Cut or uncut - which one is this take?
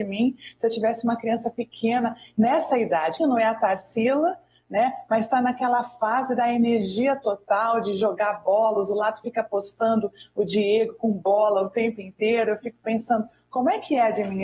cut